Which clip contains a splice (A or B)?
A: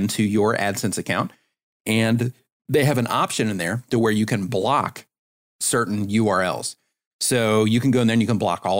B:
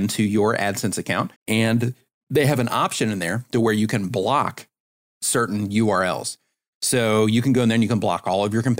B